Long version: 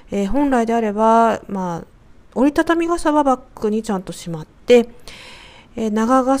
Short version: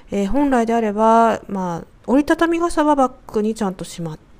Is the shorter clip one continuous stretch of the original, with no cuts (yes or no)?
no